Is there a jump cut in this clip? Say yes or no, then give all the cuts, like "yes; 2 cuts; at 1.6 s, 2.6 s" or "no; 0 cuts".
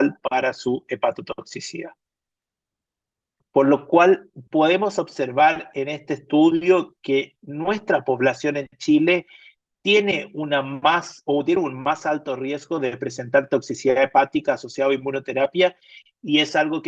no; 0 cuts